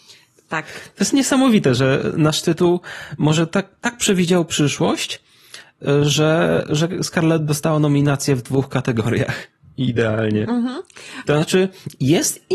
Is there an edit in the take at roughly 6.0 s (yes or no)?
no